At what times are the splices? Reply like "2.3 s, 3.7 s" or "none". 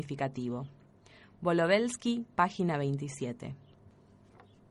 2.3 s